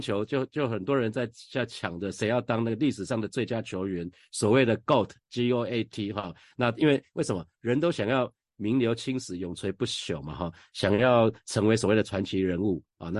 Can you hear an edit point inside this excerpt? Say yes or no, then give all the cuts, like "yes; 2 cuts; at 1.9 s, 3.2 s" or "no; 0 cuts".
no; 0 cuts